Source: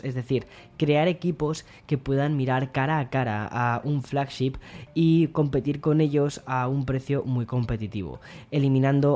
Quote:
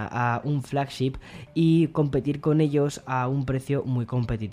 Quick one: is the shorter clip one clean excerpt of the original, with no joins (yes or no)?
yes